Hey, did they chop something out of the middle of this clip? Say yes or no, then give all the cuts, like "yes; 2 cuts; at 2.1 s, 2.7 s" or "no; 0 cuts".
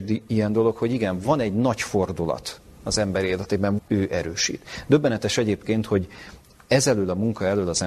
yes; 1 cut; at 3.8 s